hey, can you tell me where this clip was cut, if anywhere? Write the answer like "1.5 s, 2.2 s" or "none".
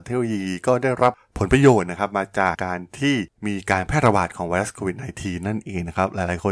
2.5 s